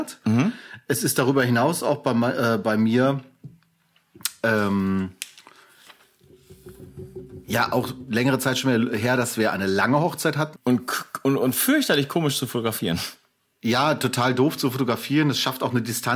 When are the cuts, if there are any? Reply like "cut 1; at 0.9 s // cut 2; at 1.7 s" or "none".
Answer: cut 1; at 10.5 s